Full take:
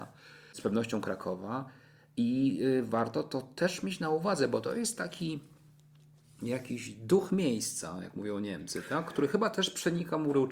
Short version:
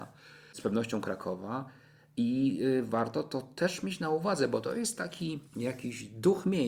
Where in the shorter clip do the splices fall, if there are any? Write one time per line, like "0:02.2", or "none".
0:05.5